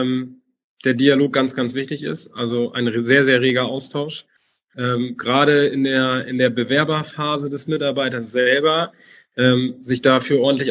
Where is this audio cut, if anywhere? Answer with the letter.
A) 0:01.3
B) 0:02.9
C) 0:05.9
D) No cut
D